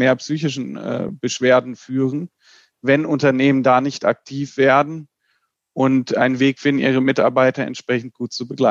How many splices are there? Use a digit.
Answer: 0